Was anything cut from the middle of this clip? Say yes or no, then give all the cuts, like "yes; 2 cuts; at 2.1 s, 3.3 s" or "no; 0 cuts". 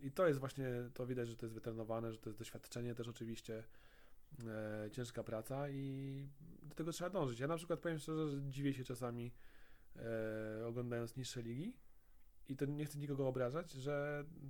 no; 0 cuts